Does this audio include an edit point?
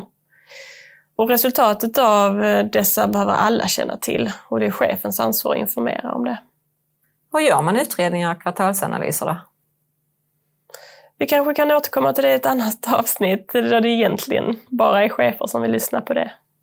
yes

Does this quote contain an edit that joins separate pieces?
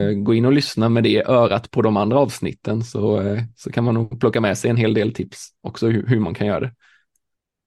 no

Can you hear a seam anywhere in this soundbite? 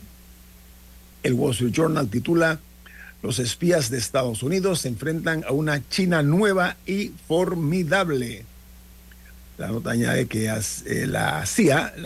no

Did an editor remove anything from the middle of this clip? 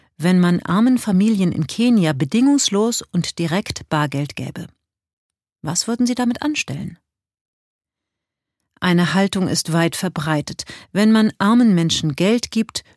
no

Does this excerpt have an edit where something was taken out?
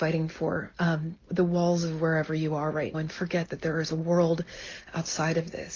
yes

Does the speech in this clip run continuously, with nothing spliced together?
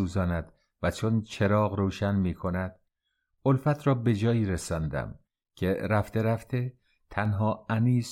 yes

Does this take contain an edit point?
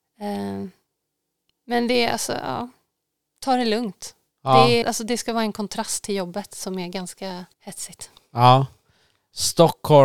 yes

